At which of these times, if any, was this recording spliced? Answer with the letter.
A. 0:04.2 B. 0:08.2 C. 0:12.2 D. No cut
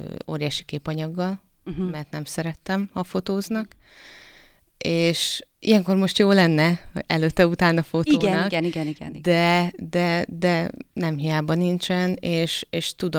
D